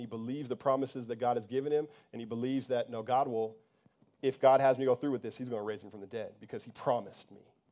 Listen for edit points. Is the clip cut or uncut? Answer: uncut